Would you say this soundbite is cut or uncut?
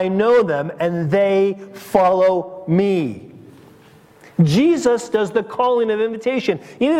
uncut